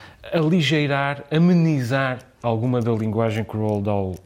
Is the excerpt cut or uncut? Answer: uncut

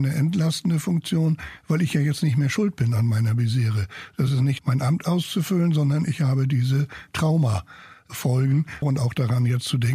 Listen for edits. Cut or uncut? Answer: cut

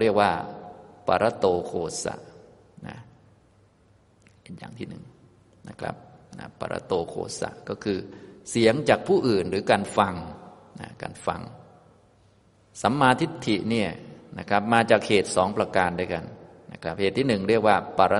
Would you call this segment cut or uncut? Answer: uncut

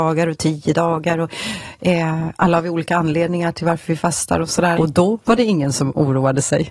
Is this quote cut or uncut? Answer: cut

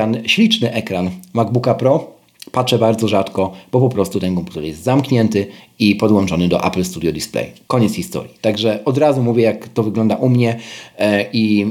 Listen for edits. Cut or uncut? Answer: uncut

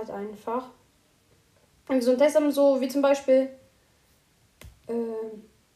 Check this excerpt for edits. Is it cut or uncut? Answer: uncut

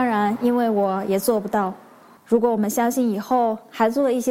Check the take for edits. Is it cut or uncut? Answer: cut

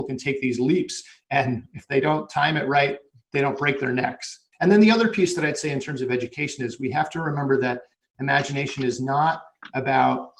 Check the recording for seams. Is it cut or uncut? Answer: cut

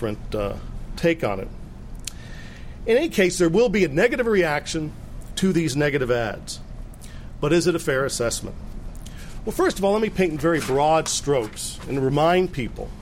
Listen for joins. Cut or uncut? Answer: uncut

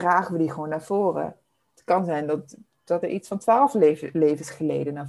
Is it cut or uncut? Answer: cut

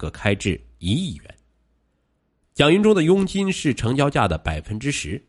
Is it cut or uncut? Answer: uncut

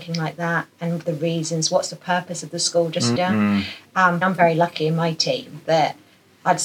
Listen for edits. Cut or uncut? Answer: cut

